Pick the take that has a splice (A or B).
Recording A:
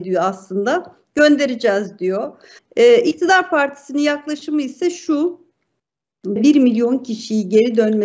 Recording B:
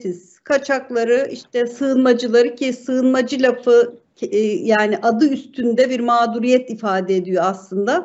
A